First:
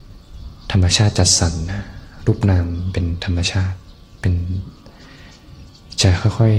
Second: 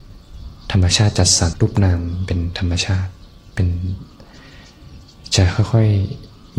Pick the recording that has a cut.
second; 1 cut; at 1.5 s

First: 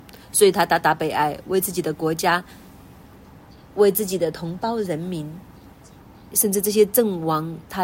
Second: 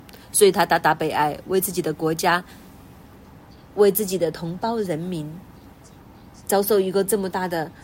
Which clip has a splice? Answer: first; 1 cut; at 6.3 s

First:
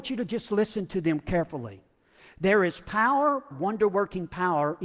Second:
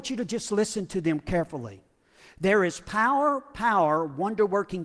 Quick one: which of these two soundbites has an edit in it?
first; 1 cut; at 3.5 s

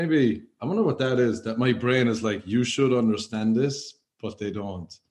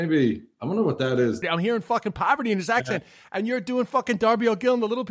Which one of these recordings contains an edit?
second; 1 cut; at 1.4 s

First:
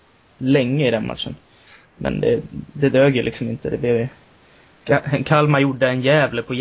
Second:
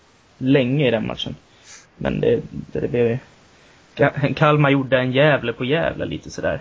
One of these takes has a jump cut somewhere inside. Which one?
second; 1 cut; at 2.7 s

